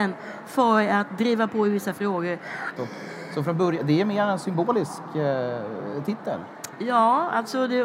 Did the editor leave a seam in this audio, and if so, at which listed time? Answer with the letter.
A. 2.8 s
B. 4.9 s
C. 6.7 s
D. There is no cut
A